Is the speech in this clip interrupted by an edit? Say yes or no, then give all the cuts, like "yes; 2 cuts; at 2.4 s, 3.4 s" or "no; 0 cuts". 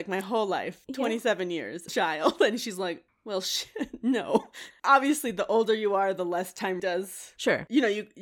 yes; 3 cuts; at 1.9 s, 4.7 s, 6.8 s